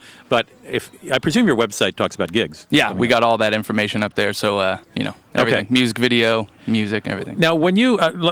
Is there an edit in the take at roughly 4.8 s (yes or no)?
yes